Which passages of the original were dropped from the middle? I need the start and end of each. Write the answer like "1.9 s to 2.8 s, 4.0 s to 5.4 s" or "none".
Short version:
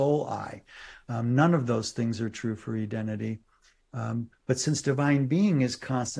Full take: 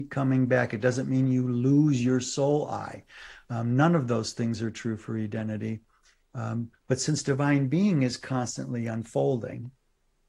none